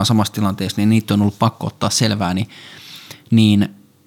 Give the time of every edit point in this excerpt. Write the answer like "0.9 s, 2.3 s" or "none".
none